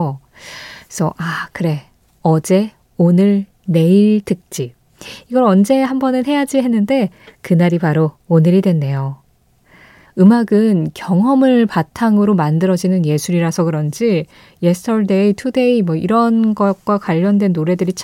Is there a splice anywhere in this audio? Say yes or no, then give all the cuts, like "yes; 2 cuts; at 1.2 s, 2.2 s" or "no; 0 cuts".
yes; 1 cut; at 10.1 s